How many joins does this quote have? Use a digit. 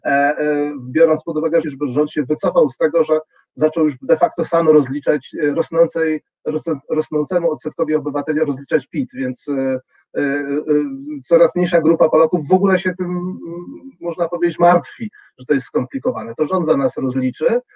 1